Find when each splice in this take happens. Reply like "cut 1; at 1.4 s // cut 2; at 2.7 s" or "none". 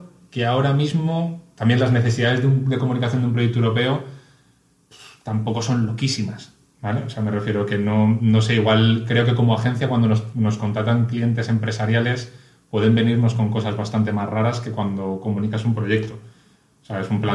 none